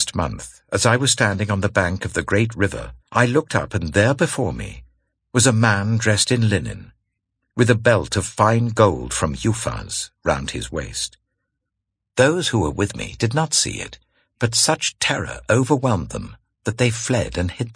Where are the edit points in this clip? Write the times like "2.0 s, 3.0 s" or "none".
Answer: 3.0 s, 12.0 s